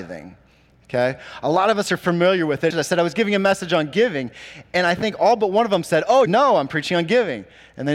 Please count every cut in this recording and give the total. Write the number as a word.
two